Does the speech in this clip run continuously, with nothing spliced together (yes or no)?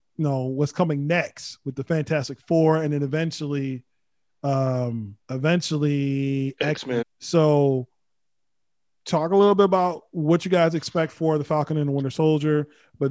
no